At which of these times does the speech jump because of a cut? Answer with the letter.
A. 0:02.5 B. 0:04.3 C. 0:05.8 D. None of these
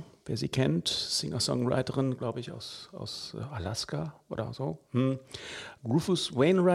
C